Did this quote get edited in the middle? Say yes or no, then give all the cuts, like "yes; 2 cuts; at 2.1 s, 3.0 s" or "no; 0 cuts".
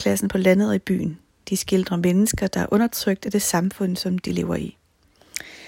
no; 0 cuts